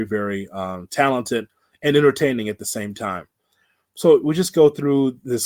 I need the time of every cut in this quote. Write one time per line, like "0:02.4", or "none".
none